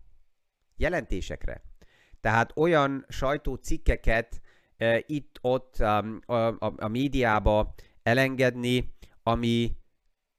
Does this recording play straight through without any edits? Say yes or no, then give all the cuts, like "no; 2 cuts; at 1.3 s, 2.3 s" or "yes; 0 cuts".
yes; 0 cuts